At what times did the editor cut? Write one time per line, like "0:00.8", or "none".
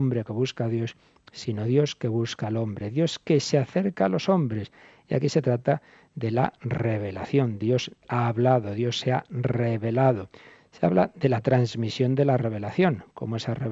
none